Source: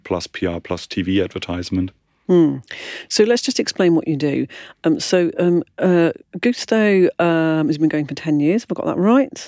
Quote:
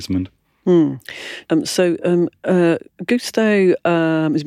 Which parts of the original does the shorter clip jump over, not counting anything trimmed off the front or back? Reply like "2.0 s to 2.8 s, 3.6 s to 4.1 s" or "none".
3.0 s to 4.8 s